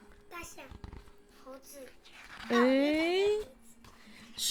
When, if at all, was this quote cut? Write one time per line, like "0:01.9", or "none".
0:01.3

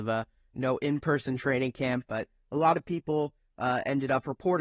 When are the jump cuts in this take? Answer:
none

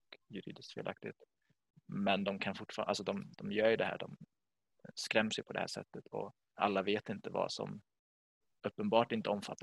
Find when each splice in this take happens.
0:06.6

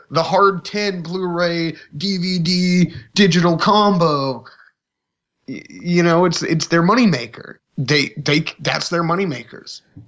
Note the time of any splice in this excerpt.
0:07.6

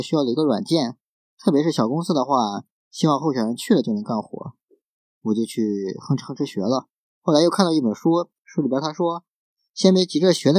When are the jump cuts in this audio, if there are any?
0:07.1
0:08.4

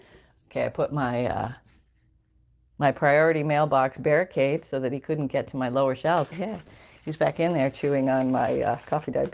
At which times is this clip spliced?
0:06.3

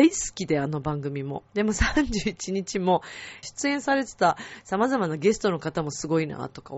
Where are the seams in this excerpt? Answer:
0:01.5
0:03.4

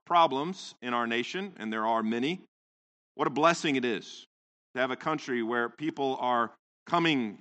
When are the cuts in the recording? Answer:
none

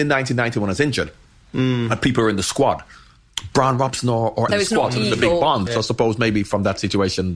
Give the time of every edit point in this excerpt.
0:04.5
0:05.7

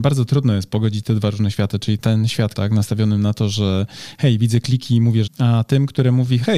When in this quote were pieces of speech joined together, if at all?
0:02.5
0:05.3

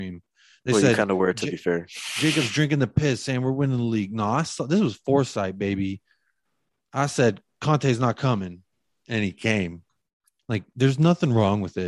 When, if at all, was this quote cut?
0:10.4

